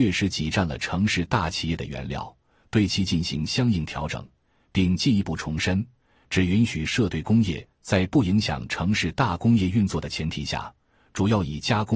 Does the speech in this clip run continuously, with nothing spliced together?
yes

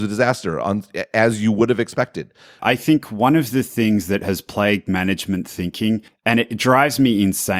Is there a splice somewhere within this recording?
yes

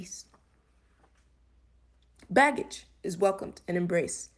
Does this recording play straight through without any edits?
yes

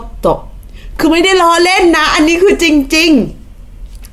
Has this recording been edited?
no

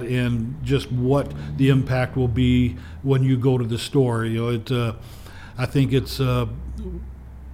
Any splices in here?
no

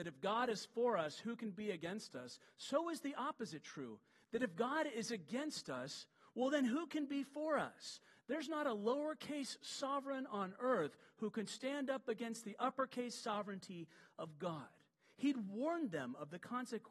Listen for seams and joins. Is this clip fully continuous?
yes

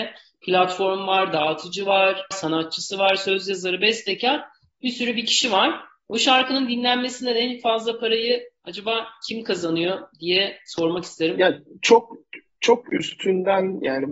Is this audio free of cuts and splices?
no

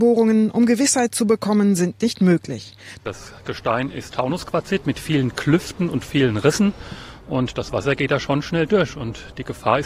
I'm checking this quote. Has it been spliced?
yes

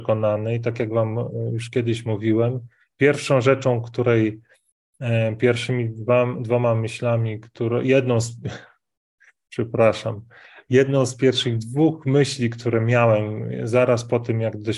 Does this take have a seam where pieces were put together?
no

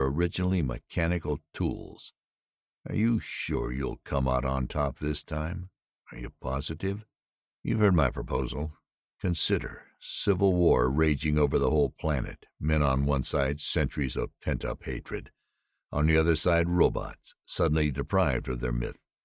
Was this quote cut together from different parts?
yes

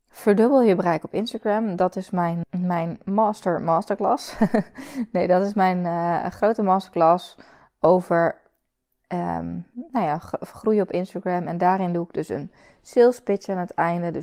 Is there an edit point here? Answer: yes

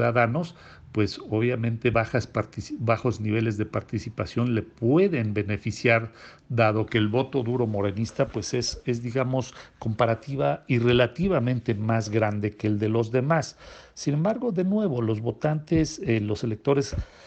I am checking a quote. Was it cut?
no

